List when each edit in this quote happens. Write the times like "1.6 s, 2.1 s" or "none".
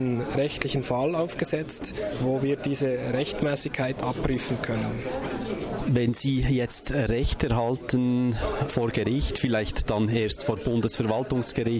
8.7 s